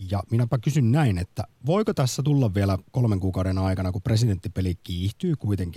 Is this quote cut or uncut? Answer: uncut